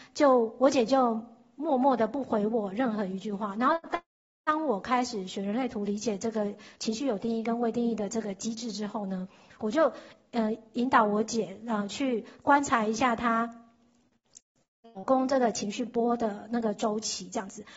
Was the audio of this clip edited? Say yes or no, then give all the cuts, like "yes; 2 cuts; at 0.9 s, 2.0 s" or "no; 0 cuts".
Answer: no; 0 cuts